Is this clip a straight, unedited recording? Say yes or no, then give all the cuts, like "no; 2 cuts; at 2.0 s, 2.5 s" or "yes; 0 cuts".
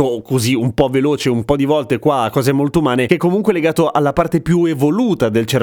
yes; 0 cuts